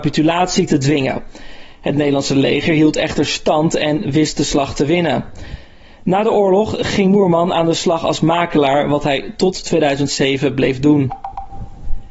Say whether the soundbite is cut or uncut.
uncut